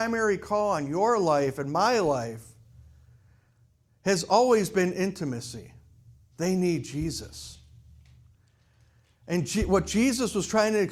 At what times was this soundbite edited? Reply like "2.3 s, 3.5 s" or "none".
6.3 s